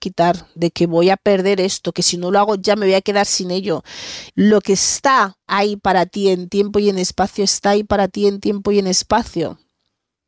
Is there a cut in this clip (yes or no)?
yes